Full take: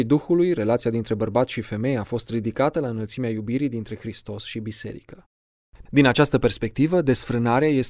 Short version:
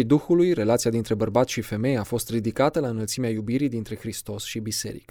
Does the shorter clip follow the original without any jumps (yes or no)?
yes